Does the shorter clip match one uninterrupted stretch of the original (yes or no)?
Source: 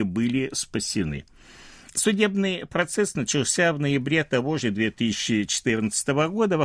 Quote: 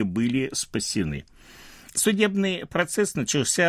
yes